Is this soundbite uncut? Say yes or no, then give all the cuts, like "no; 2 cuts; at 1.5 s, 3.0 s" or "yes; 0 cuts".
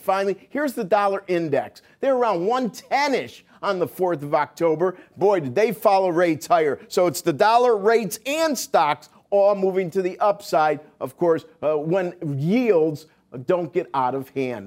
yes; 0 cuts